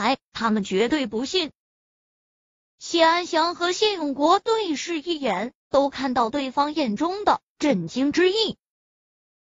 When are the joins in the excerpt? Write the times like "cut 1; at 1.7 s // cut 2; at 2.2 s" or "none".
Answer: none